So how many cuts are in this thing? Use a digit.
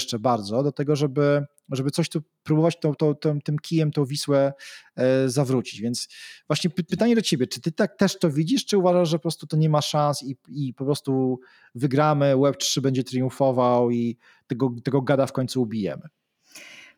0